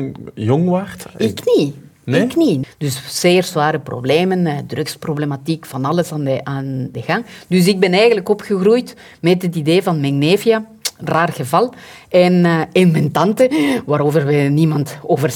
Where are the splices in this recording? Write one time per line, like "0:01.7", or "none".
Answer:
0:02.6